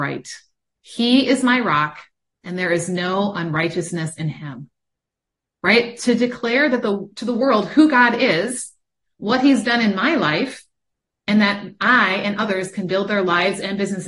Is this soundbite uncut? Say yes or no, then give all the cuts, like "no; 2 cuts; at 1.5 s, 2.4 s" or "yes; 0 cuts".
yes; 0 cuts